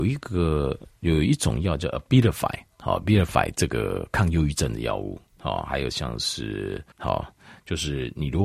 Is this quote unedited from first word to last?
no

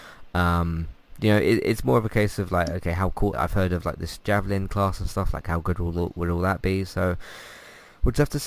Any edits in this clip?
yes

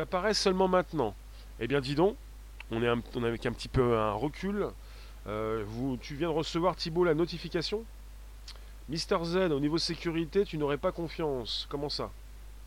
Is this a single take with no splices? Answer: yes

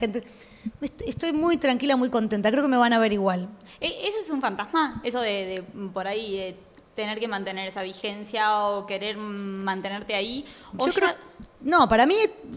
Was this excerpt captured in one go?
yes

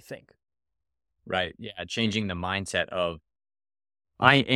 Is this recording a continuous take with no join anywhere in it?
yes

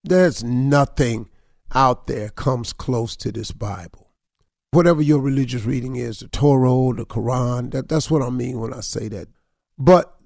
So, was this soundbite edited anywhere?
no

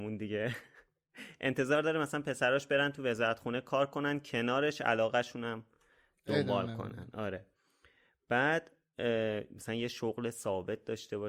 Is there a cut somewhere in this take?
no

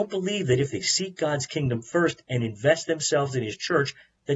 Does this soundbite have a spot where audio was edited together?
no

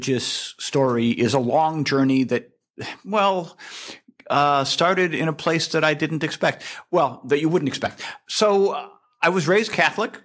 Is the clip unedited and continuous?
yes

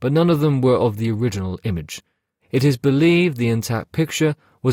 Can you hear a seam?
yes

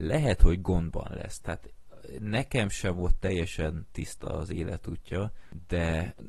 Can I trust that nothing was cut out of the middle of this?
yes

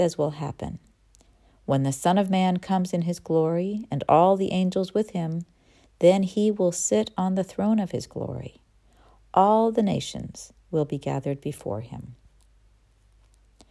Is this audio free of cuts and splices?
yes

